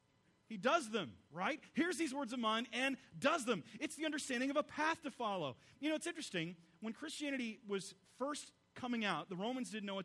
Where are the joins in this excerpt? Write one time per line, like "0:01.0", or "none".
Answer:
none

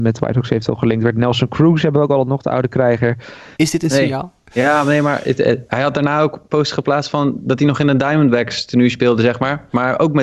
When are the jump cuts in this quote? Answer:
0:03.6

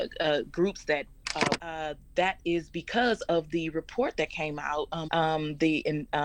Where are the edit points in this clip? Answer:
0:01.6
0:05.1

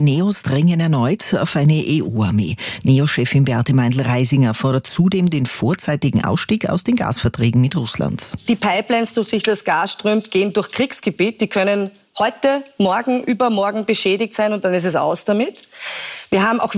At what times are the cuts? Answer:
none

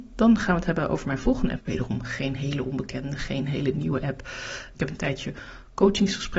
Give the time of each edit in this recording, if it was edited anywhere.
0:01.6
0:04.7

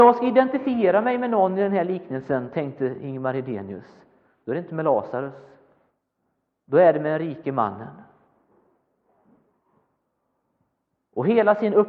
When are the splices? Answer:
none

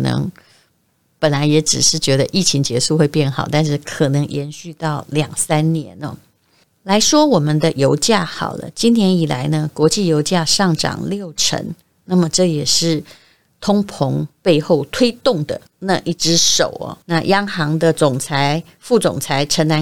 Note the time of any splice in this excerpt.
0:15.7
0:17.0

